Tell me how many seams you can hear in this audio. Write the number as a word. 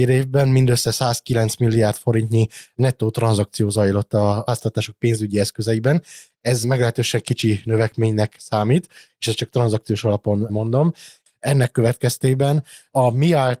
two